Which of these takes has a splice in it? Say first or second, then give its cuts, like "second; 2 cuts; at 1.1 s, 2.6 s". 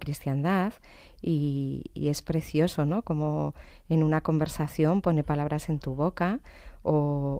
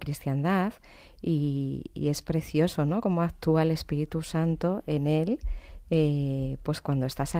first; 1 cut; at 3.0 s